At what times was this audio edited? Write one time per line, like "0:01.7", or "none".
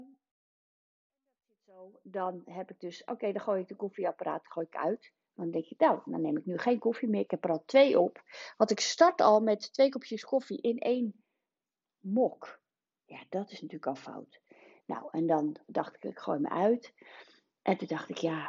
none